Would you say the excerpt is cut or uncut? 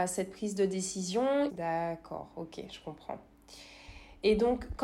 cut